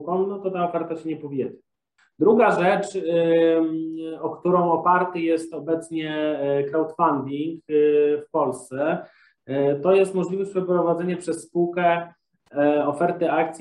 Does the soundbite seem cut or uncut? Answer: uncut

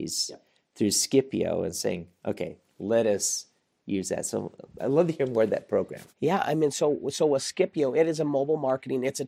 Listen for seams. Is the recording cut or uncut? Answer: uncut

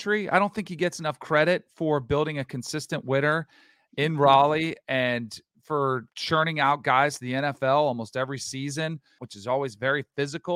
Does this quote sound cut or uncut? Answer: cut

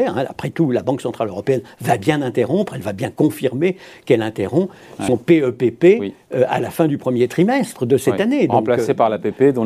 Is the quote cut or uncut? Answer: uncut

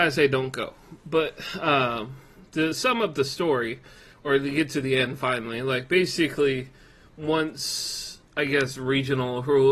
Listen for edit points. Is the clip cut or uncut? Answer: uncut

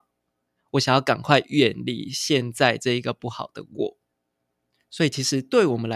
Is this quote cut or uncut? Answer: uncut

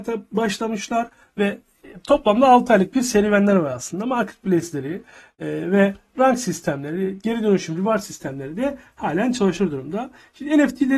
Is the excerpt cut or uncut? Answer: uncut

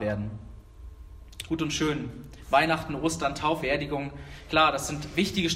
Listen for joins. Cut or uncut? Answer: cut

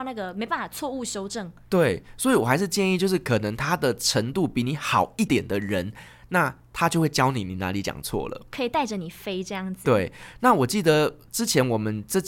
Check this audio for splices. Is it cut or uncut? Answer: cut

